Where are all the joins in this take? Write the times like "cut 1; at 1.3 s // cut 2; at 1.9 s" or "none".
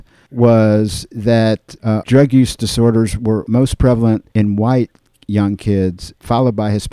cut 1; at 2.0 s // cut 2; at 4.3 s

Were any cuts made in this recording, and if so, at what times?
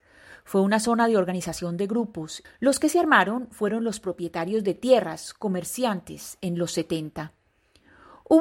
cut 1; at 2.4 s

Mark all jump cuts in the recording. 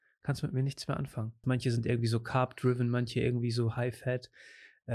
cut 1; at 1.4 s

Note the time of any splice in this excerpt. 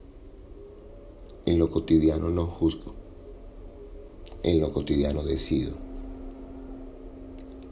none

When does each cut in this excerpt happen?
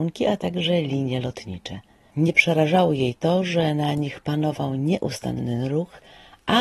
cut 1; at 2.1 s

